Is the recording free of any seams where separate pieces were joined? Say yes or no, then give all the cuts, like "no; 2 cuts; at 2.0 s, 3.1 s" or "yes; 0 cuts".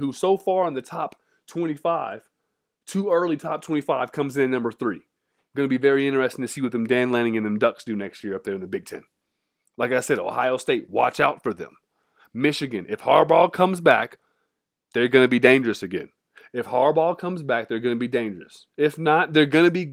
yes; 0 cuts